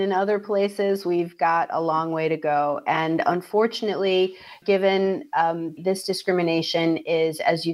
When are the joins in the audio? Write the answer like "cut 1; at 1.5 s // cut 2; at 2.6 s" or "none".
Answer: cut 1; at 4.6 s // cut 2; at 5.8 s